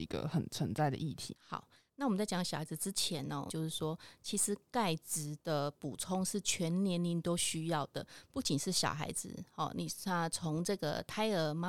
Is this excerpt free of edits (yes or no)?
no